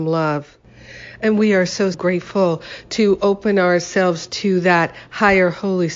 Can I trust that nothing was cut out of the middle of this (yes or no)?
no